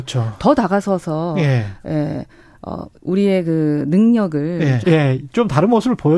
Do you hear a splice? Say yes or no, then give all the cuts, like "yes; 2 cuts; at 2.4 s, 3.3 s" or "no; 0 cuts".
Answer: yes; 2 cuts; at 2.9 s, 4.8 s